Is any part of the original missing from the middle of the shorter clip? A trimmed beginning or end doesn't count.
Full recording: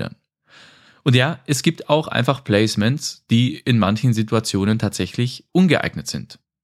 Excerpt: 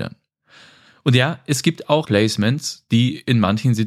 yes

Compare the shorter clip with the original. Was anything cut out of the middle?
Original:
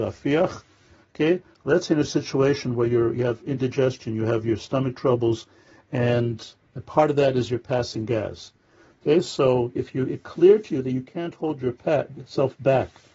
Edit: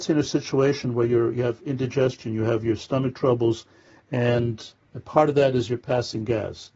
no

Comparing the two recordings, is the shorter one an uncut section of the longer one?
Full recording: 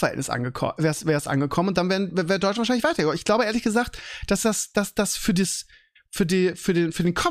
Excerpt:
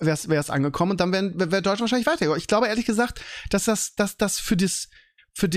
yes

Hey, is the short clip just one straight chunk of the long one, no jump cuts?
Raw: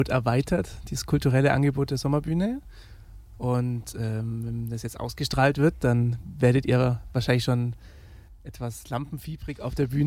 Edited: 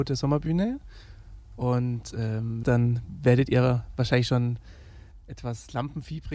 no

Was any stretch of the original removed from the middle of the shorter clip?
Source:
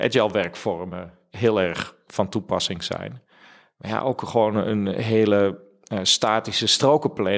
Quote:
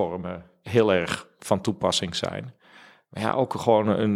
no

